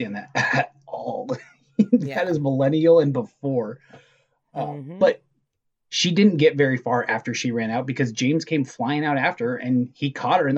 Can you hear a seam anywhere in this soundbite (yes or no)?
no